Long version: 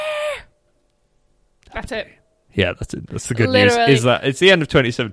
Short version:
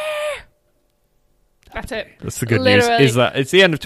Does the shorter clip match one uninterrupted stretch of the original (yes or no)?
no